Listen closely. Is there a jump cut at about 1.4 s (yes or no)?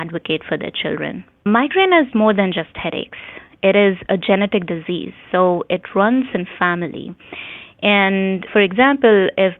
yes